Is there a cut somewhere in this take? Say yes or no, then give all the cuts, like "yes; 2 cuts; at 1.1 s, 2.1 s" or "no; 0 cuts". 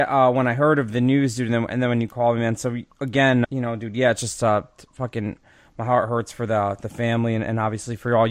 yes; 1 cut; at 3.4 s